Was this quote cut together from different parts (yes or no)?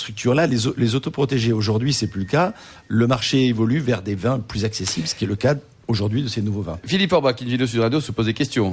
no